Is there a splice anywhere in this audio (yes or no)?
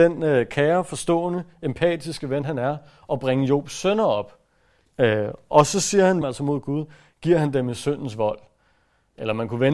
yes